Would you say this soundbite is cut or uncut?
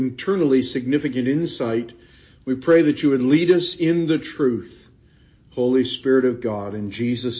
uncut